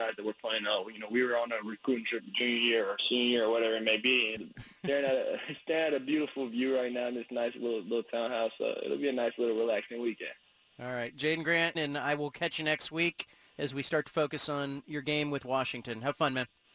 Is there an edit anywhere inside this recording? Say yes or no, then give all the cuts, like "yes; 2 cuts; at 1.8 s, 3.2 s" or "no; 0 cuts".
yes; 2 cuts; at 4.3 s, 11.7 s